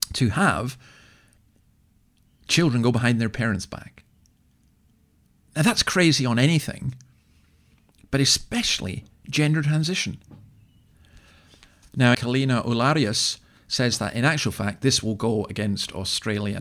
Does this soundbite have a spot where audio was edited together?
yes; 1 cut; at 12.1 s

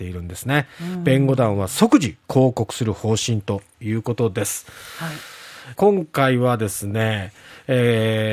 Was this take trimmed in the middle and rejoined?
yes; 1 cut; at 5.8 s

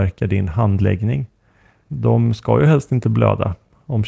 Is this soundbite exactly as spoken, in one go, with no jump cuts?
no; 1 cut; at 1.9 s

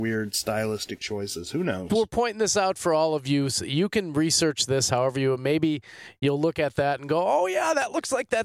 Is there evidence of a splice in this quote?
no; 0 cuts

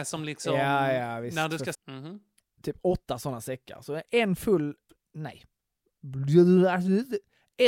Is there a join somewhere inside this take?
yes; 1 cut; at 1.7 s

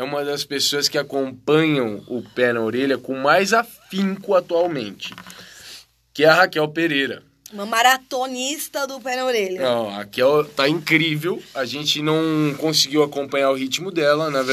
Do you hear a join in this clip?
no; 0 cuts

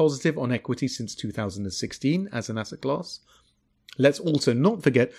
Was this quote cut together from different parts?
no; 0 cuts

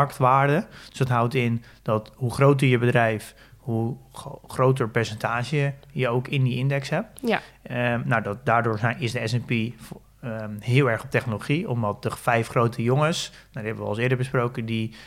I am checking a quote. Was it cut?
no; 0 cuts

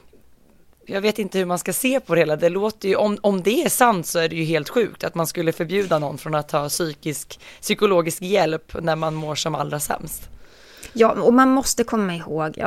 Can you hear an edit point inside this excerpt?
no; 0 cuts

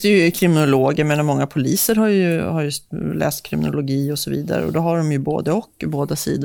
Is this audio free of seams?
yes; 0 cuts

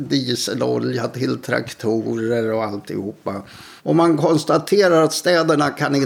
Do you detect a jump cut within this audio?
yes; 1 cut; at 3.8 s

